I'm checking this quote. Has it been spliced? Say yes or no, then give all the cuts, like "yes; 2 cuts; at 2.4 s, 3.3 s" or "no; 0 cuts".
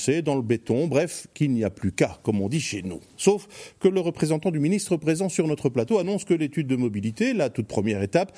no; 0 cuts